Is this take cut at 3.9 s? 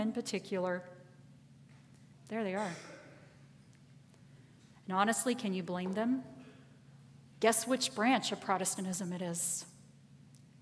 no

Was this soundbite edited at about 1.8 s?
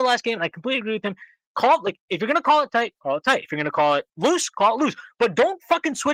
no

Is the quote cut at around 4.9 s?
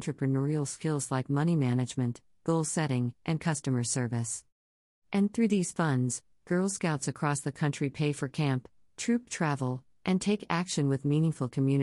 yes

